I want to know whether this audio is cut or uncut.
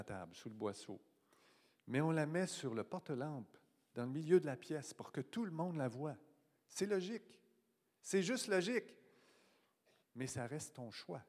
cut